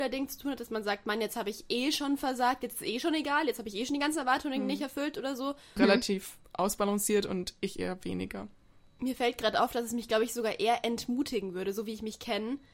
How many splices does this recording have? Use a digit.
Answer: 1